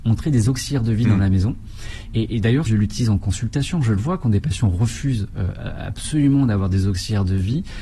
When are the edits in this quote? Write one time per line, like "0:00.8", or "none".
0:02.7